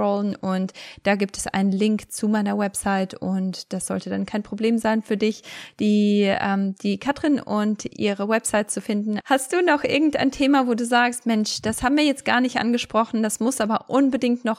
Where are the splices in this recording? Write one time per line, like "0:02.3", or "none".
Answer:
0:09.2